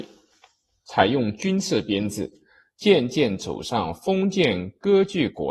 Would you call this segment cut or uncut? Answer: cut